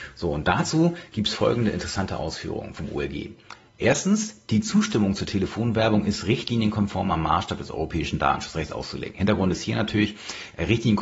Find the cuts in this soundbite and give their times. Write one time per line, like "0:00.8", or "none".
none